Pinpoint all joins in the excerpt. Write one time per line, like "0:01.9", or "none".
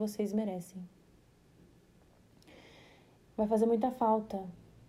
0:03.2

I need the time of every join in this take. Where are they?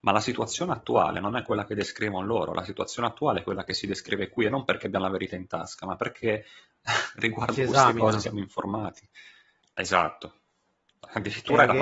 0:09.6

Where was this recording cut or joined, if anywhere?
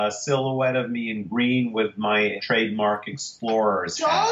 0:02.4

